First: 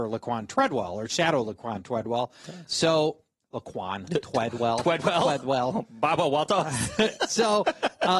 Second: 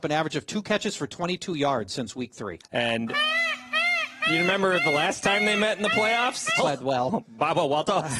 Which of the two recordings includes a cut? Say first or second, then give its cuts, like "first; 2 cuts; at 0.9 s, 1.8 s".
second; 2 cuts; at 2.6 s, 6.6 s